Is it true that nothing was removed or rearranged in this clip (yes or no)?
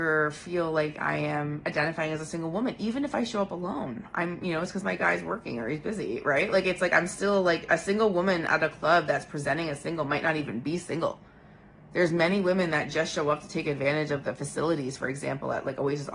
yes